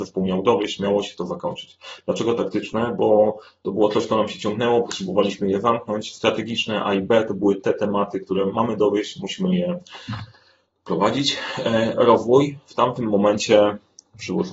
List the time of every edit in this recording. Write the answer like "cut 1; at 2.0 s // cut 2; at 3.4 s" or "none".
none